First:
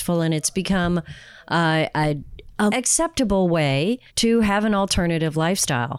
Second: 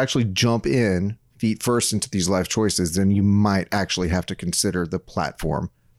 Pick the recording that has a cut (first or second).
first